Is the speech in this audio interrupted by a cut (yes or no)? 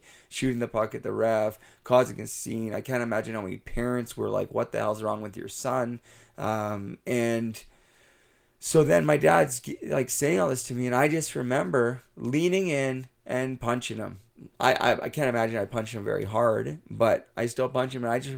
no